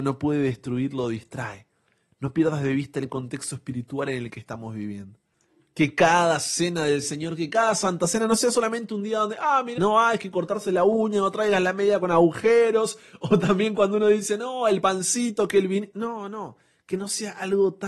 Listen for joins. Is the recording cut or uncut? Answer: cut